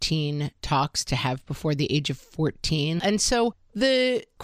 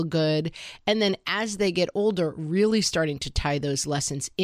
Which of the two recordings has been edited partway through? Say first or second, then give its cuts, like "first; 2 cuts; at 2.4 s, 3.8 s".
first; 1 cut; at 3.0 s